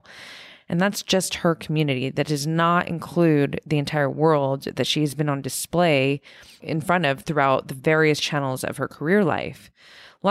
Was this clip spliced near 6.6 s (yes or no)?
yes